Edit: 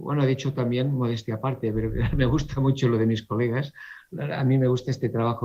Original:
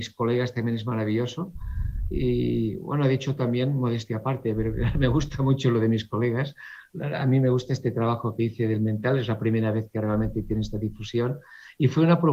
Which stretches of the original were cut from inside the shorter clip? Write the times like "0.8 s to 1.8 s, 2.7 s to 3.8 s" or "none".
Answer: none